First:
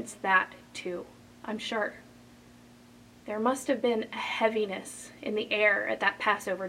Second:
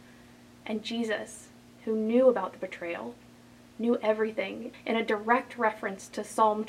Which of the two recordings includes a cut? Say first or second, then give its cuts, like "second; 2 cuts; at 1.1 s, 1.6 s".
second; 1 cut; at 4.7 s